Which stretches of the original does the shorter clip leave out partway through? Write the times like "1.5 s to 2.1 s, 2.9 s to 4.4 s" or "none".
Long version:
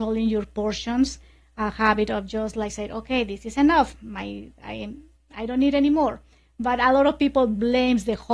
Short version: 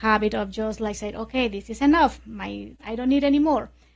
4.5 s to 5.3 s